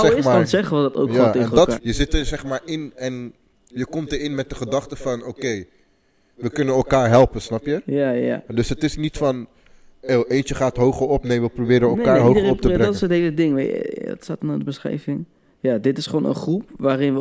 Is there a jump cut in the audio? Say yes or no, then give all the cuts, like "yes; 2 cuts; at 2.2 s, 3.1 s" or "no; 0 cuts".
yes; 1 cut; at 1.8 s